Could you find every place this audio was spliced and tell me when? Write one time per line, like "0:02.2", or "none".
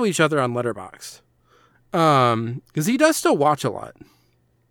0:01.7